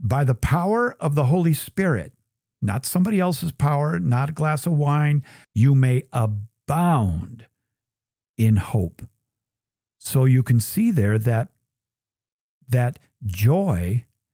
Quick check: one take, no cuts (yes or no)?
no